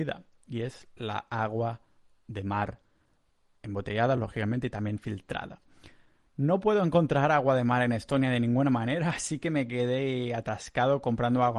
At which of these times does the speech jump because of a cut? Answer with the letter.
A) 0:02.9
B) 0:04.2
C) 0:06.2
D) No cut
D